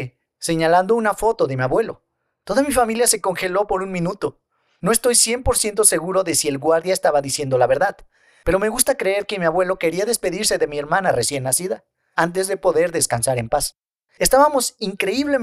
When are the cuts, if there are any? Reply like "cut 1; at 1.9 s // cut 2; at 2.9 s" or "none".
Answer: cut 1; at 14.1 s